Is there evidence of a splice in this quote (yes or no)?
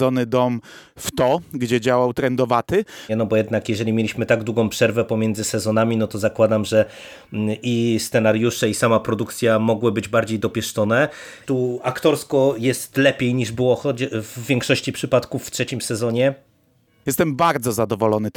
yes